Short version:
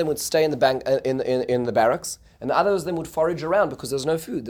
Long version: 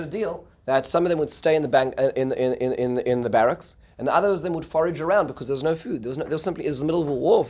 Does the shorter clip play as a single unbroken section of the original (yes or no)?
no